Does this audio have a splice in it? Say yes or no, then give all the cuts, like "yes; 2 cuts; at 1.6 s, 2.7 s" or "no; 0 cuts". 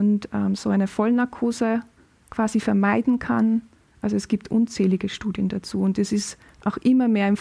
no; 0 cuts